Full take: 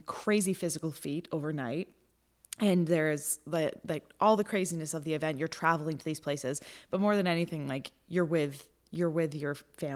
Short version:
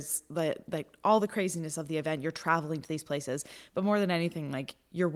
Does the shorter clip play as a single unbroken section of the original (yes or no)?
yes